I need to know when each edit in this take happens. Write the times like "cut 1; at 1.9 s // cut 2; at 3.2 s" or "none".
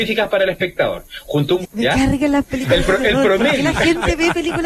cut 1; at 1.6 s